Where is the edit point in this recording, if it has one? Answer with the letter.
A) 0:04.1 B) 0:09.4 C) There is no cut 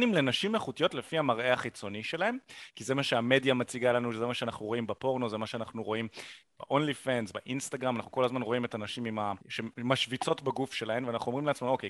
B